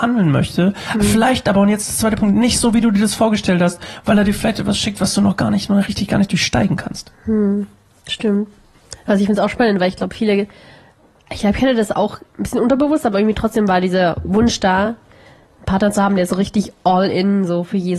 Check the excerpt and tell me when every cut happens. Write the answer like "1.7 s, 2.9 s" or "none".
none